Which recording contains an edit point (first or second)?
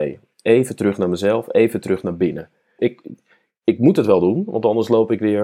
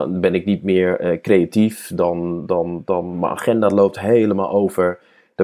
first